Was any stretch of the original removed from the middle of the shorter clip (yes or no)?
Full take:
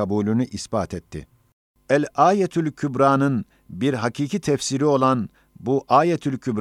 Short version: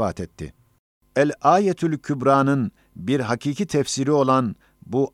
no